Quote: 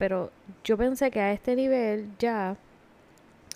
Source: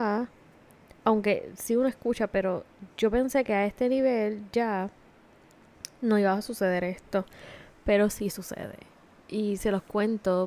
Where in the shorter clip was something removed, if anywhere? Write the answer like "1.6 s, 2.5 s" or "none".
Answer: none